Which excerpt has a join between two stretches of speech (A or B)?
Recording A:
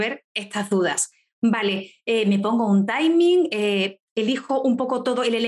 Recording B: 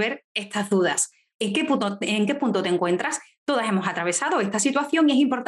B